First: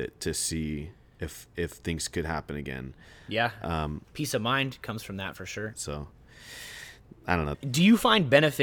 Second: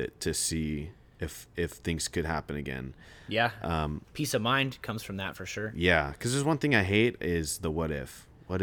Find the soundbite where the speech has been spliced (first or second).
first